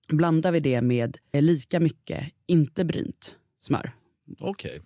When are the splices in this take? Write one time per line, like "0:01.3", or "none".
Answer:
0:01.3